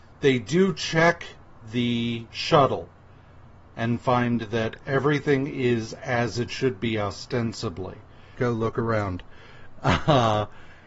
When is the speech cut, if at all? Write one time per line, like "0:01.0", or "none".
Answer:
0:02.3
0:08.3